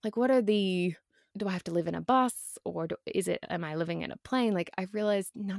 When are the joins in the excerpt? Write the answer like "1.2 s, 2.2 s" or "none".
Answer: 1.3 s